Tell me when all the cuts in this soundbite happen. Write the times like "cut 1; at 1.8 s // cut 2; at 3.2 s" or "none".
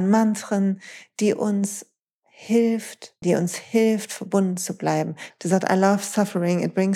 cut 1; at 3.2 s // cut 2; at 5.3 s